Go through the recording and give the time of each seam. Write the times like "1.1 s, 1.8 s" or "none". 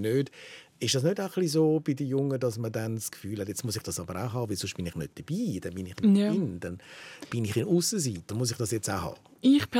4.9 s, 8.3 s